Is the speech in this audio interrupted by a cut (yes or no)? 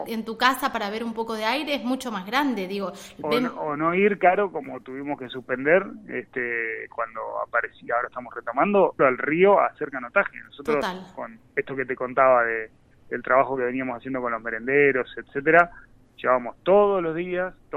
yes